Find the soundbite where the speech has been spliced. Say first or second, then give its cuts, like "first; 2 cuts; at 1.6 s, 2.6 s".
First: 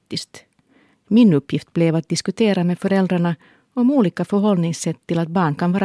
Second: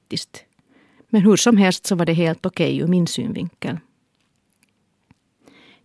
first; 1 cut; at 0.9 s